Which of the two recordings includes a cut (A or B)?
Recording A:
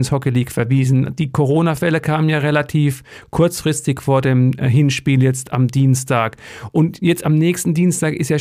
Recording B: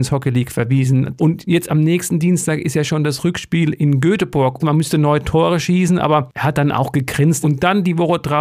B